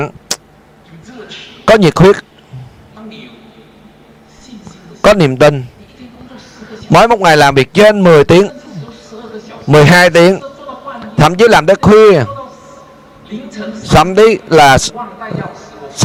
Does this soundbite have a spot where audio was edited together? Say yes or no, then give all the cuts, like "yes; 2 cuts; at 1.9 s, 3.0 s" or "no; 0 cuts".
no; 0 cuts